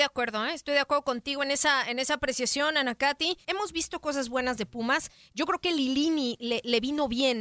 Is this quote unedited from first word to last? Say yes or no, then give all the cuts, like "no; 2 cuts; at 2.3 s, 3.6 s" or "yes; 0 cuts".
no; 1 cut; at 3.4 s